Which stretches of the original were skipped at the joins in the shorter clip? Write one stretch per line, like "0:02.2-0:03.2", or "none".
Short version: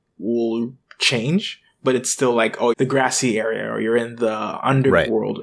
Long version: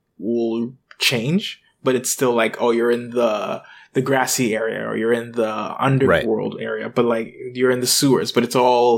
0:02.7-0:03.9